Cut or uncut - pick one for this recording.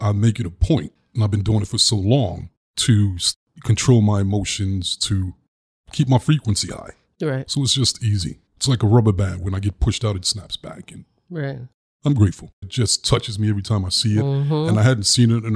cut